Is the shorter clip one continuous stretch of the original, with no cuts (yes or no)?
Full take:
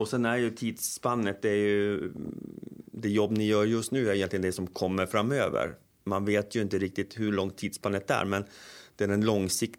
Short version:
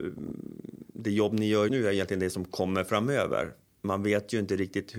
no